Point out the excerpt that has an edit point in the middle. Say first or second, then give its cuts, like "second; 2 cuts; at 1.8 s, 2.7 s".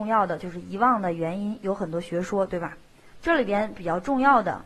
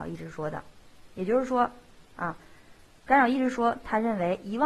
first; 1 cut; at 3.2 s